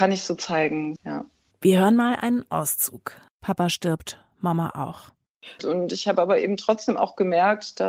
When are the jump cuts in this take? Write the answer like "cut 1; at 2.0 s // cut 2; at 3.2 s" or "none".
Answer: cut 1; at 1.0 s // cut 2; at 5.6 s